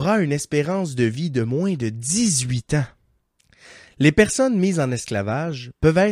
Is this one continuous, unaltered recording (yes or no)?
yes